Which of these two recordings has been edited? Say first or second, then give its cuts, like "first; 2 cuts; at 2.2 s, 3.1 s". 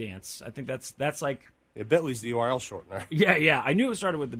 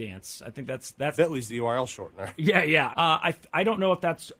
second; 2 cuts; at 1.1 s, 2.9 s